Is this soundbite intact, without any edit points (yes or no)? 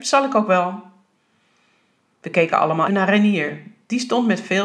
no